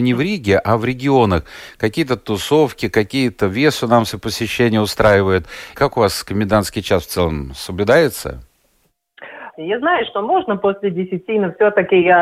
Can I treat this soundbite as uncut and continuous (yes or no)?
no